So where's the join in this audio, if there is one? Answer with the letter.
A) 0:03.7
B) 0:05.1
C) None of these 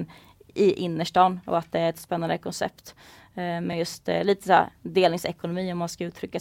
C